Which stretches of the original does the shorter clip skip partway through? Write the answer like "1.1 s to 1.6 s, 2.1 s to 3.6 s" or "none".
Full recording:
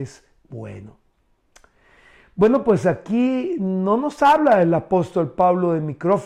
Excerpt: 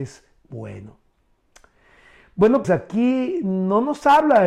2.6 s to 2.8 s